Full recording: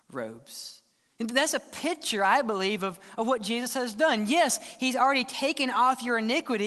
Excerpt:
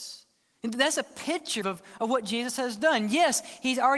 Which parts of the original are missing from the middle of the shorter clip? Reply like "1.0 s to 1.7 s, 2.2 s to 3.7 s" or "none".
2.2 s to 2.8 s